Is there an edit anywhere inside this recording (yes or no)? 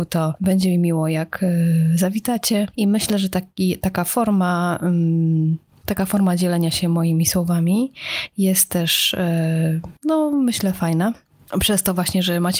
yes